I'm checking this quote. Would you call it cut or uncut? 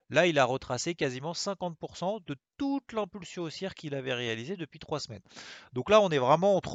uncut